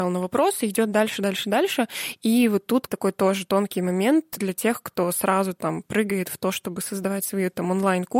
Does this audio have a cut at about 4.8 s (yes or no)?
no